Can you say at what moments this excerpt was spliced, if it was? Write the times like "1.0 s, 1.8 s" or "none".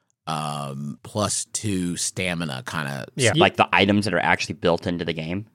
1.0 s, 3.3 s

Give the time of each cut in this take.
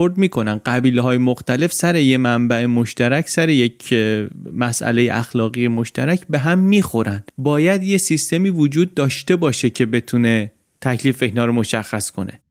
none

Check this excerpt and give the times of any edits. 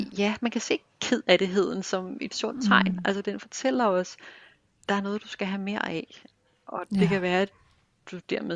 none

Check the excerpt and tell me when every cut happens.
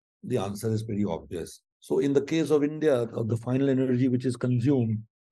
1.7 s

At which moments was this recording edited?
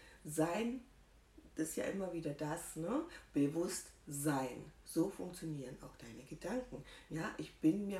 4.8 s, 7.1 s

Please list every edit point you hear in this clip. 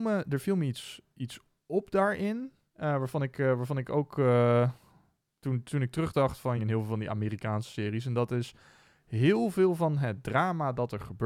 6.6 s

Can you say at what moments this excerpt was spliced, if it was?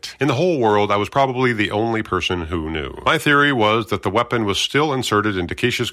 none

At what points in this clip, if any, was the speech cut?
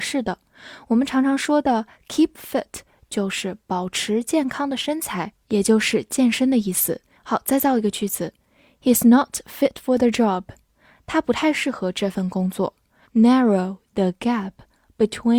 7.2 s, 13.0 s

